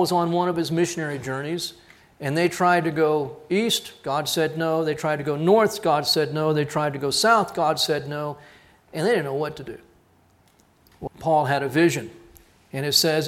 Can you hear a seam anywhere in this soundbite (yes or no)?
yes